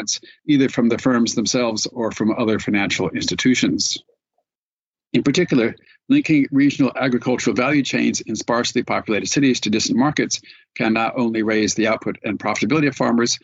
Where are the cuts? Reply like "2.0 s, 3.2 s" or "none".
4.9 s